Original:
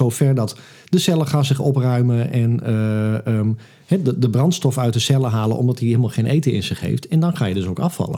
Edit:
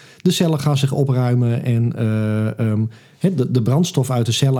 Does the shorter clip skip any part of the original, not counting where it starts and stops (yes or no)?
no